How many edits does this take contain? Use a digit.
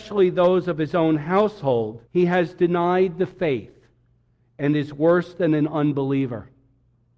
1